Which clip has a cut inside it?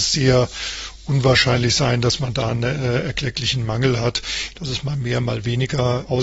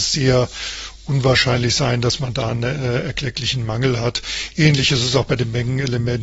first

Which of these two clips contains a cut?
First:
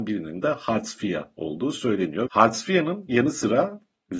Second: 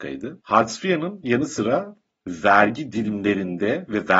first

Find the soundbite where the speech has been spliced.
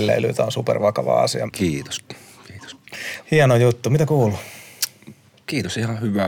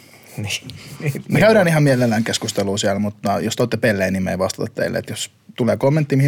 first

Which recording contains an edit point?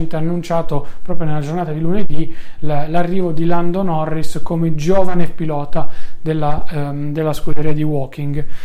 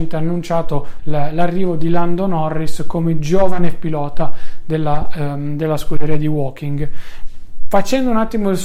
second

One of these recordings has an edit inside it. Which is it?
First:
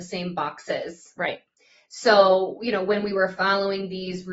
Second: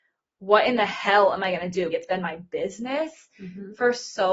second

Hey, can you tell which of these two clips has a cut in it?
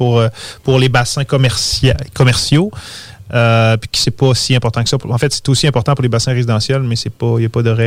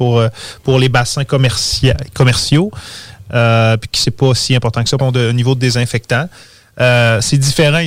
second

